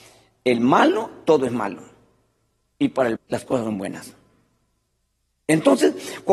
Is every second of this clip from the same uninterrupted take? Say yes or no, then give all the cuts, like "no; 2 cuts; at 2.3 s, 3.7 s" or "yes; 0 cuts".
no; 1 cut; at 3.2 s